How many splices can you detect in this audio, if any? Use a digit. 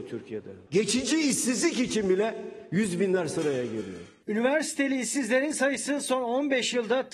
0